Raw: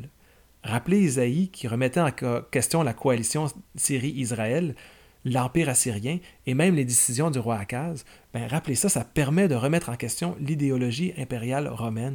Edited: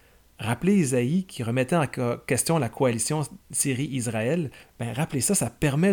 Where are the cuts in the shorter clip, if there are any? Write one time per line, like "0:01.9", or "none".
0:04.6